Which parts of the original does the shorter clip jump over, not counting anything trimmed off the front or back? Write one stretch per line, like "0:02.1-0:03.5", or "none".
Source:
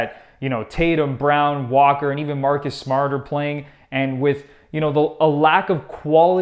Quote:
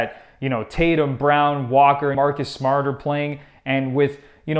0:02.1-0:02.4